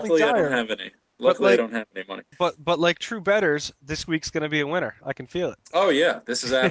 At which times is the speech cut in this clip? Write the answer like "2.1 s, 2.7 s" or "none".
2.3 s